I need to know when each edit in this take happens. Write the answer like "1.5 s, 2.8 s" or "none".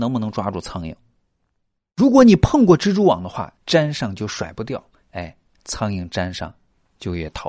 3.6 s